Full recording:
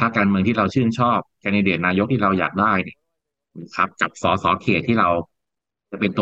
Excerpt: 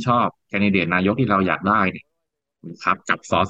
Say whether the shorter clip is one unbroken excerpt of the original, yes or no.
yes